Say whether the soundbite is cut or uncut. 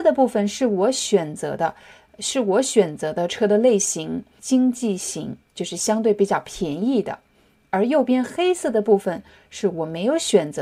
uncut